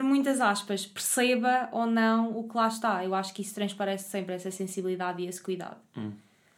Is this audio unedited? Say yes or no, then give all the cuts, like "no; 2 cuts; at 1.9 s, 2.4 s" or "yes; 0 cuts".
yes; 0 cuts